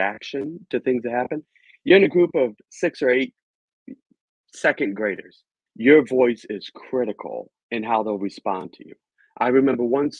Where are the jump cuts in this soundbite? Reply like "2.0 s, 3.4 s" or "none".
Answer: 5.7 s, 7.6 s